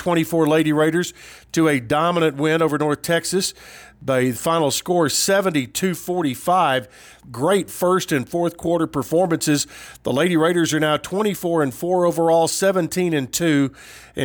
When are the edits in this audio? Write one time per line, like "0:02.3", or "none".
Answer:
0:07.2